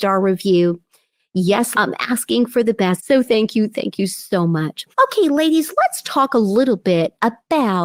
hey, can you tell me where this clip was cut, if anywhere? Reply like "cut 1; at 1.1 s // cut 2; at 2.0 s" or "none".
cut 1; at 1.7 s // cut 2; at 3.0 s